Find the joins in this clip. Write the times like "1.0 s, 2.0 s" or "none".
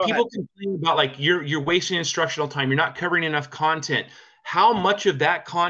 none